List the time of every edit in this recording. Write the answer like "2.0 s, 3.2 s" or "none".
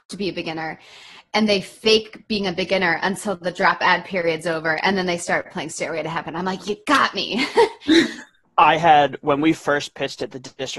none